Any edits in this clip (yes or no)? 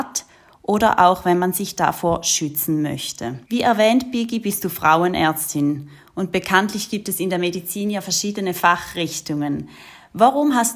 yes